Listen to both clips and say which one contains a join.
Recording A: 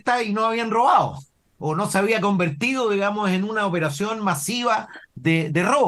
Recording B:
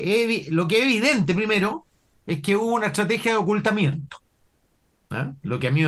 A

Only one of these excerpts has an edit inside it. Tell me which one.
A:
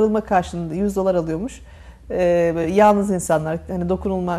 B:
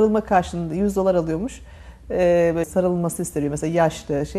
B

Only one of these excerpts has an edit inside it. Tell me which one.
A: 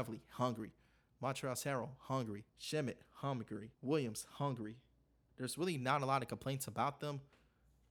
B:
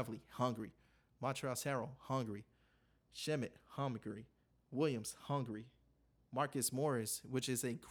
A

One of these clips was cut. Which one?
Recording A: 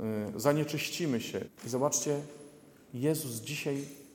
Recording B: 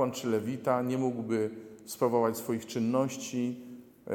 A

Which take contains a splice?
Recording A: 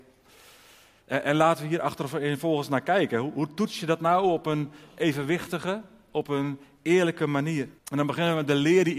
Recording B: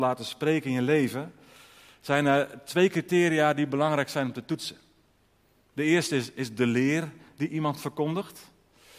A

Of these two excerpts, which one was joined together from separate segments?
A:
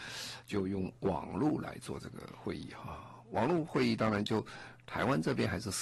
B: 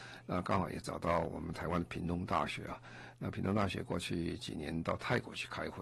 B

